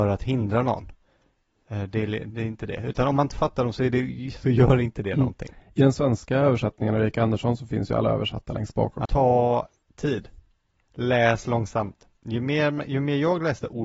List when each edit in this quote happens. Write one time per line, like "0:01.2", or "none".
0:09.1